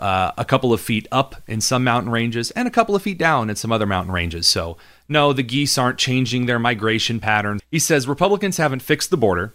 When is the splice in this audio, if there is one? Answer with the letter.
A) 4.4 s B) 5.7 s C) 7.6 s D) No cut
C